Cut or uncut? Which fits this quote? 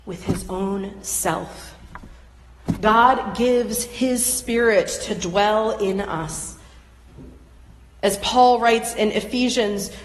uncut